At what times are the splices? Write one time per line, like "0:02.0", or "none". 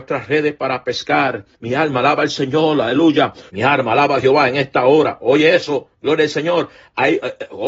0:01.5
0:03.5